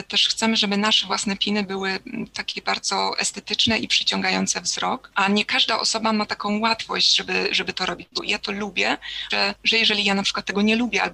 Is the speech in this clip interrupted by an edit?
yes; 2 cuts; at 8.2 s, 9.3 s

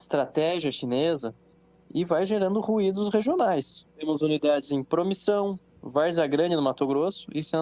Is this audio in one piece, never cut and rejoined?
no; 2 cuts; at 3.9 s, 5.8 s

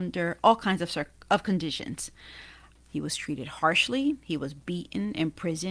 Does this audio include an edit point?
yes; 1 cut; at 2.8 s

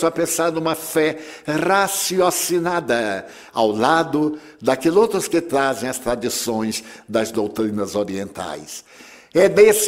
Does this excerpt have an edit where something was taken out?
no; 0 cuts

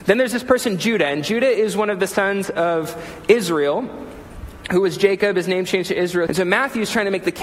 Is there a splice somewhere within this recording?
yes; 1 cut; at 6.3 s

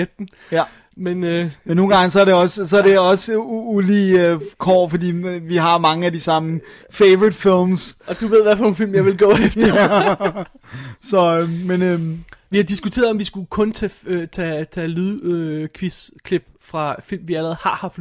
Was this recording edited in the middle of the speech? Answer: no; 0 cuts

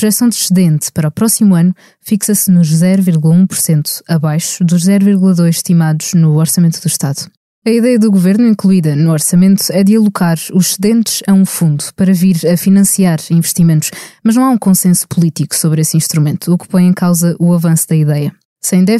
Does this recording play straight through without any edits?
yes; 0 cuts

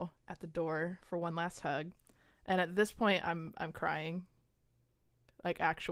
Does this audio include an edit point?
no; 0 cuts

